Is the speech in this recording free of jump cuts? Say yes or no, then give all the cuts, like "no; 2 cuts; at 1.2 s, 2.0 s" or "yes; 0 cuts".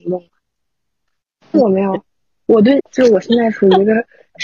no; 2 cuts; at 1.5 s, 2.8 s